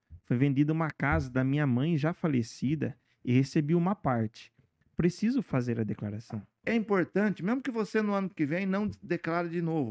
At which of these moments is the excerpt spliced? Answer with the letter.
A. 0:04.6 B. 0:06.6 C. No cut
B